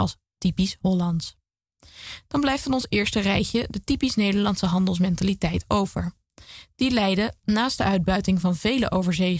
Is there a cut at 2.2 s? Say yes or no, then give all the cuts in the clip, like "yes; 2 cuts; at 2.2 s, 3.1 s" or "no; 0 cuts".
yes; 1 cut; at 2.2 s